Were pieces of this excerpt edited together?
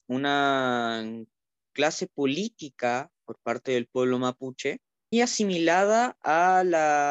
yes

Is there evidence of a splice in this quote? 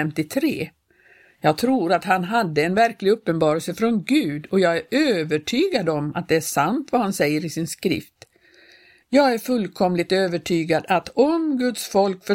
yes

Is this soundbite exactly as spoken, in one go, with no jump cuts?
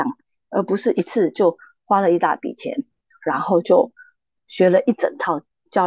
yes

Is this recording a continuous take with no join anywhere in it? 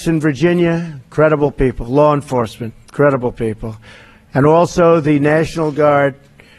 yes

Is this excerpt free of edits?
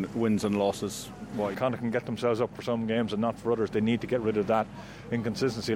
no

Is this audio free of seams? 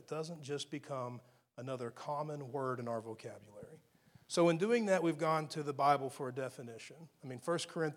yes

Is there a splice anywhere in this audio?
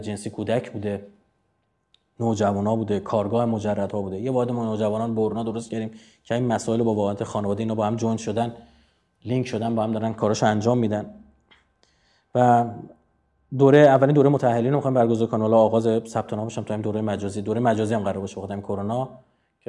no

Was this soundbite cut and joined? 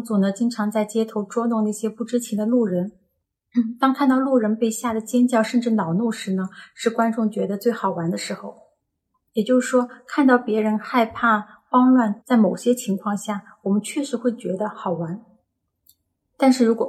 yes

